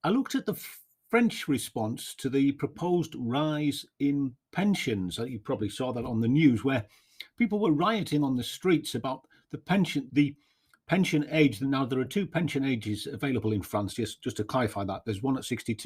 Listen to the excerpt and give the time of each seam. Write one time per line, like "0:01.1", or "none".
0:10.1